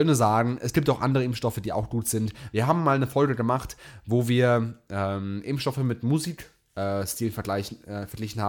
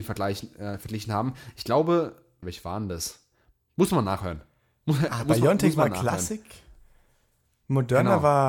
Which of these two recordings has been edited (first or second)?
second